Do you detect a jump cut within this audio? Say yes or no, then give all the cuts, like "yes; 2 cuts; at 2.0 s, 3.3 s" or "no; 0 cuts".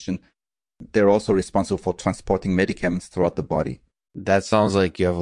yes; 1 cut; at 4.1 s